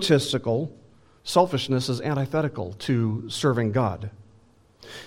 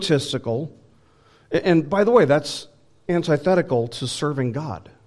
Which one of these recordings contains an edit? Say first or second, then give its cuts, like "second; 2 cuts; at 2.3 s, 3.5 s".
first; 1 cut; at 1.2 s